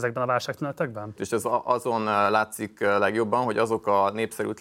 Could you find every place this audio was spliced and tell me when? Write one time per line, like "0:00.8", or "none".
0:01.2